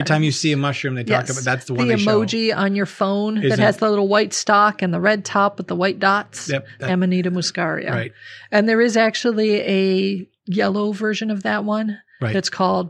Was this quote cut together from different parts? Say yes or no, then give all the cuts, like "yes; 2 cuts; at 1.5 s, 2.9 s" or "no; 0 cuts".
yes; 2 cuts; at 6.9 s, 10.4 s